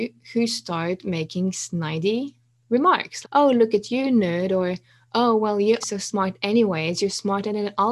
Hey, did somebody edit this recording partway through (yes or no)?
yes